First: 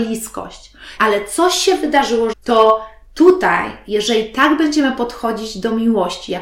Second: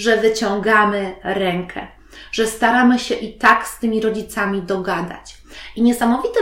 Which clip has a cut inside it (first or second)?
first